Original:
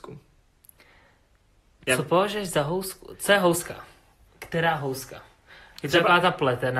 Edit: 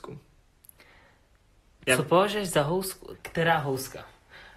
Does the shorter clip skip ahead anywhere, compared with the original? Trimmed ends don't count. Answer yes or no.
yes